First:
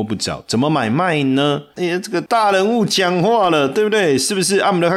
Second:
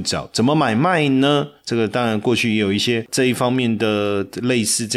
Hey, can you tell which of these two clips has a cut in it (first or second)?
first